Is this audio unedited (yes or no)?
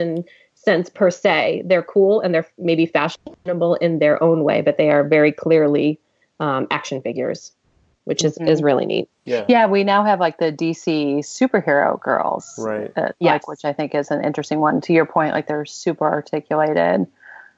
yes